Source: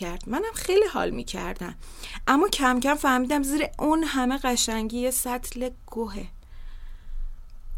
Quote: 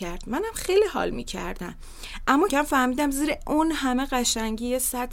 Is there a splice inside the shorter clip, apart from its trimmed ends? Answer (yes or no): yes